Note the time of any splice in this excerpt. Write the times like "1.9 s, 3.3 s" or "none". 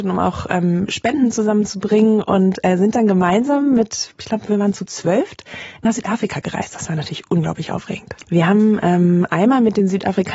8.2 s